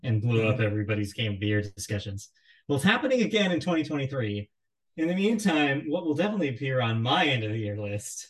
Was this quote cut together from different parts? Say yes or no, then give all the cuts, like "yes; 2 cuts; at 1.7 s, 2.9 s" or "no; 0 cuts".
yes; 1 cut; at 4.8 s